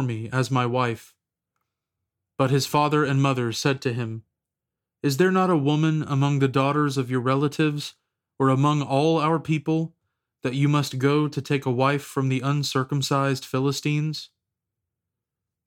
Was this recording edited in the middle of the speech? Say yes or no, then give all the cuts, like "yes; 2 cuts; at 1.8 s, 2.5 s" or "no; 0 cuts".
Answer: no; 0 cuts